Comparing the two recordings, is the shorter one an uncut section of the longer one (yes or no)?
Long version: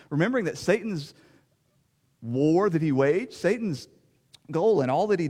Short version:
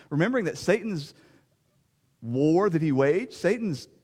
yes